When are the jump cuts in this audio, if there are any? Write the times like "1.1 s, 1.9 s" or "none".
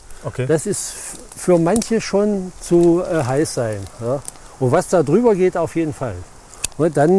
2.5 s